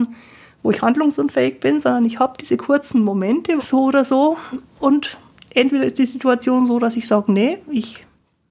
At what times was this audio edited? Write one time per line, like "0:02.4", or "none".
0:03.6

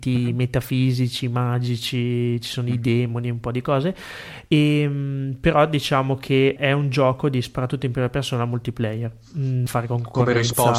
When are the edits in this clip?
0:06.6
0:09.7

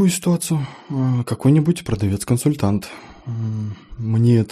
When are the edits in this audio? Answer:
none

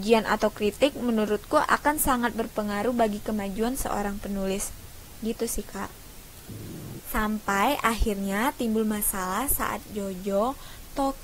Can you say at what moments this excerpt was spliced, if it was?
0:07.0

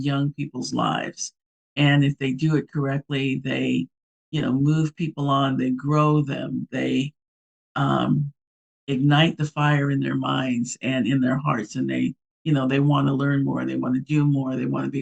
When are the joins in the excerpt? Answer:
none

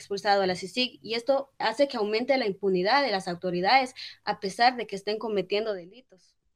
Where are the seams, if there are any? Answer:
0:01.6

